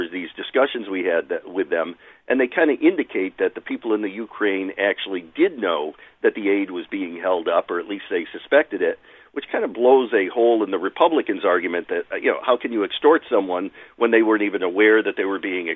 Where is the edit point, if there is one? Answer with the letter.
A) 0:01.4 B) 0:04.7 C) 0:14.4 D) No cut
D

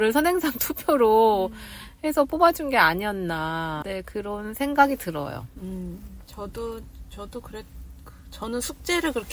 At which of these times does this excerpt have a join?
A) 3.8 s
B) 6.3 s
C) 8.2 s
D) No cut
A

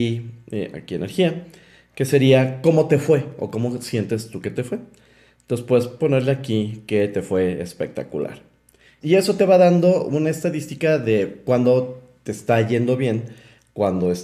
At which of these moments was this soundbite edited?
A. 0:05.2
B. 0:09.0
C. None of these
B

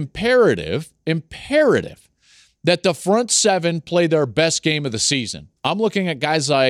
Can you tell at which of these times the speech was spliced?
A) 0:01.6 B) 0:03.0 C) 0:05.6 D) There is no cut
C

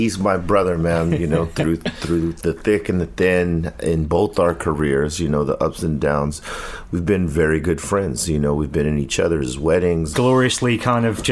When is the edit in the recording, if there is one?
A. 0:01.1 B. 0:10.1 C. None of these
B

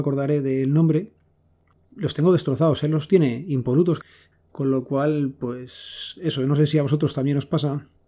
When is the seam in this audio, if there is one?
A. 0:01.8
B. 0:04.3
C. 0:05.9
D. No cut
B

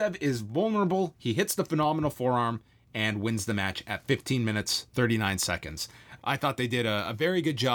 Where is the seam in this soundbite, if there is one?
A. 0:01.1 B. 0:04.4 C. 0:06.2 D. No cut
C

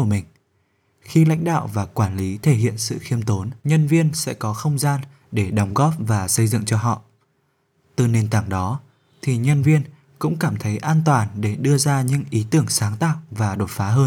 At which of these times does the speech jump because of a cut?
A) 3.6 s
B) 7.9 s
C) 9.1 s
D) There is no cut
A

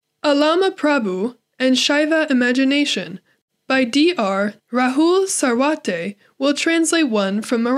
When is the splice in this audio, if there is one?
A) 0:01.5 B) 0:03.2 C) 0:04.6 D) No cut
C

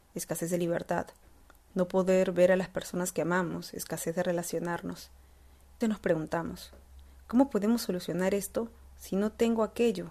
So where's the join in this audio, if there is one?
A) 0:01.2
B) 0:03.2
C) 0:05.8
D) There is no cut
C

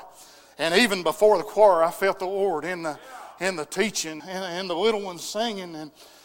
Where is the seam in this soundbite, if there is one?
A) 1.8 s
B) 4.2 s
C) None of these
B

